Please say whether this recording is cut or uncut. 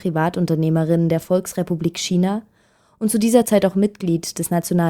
uncut